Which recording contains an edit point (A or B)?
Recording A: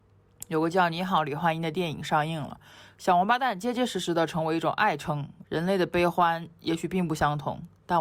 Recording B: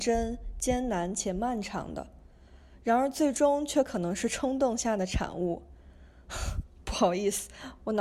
A